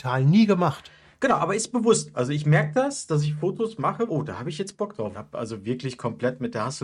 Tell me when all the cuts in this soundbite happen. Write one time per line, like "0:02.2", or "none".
0:04.1
0:05.1